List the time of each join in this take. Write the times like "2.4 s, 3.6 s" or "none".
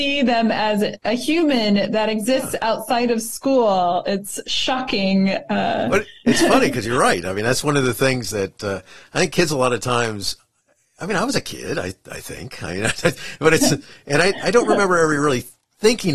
6.2 s